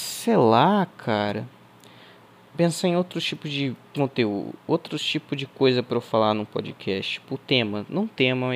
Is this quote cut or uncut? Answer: uncut